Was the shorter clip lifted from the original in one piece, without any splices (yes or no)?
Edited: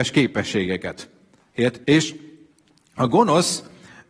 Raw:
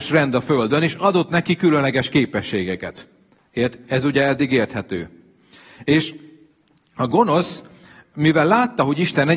no